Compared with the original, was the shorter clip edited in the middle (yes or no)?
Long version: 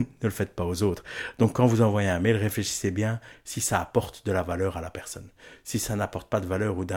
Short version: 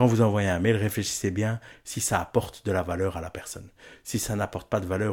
no